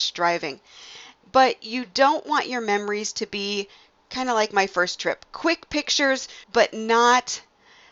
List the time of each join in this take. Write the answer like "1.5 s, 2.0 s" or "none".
1.2 s, 6.4 s